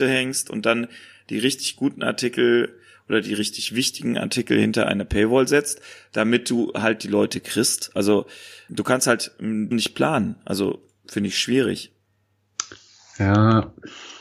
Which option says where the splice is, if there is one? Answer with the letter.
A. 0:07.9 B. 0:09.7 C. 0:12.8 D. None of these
B